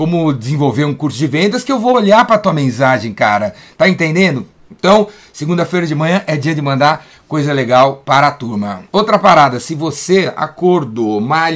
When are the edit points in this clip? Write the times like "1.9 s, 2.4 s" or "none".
none